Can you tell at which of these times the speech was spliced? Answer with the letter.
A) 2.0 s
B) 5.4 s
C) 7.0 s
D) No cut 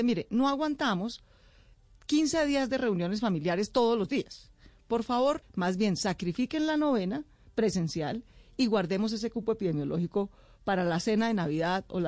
B